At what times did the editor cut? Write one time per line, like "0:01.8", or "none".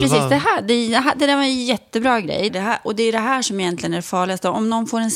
0:02.5